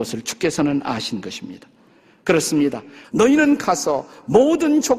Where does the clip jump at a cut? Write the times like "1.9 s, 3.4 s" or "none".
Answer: 3.0 s